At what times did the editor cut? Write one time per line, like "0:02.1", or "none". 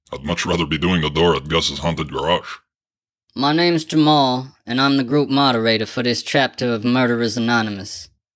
none